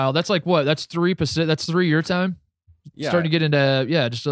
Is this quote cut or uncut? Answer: uncut